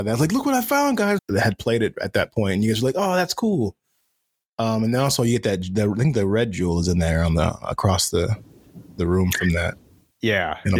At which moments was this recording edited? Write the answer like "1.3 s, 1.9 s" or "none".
1.2 s